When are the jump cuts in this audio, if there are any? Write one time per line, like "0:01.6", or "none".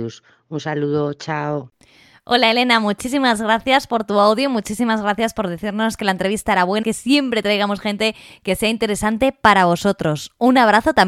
0:06.8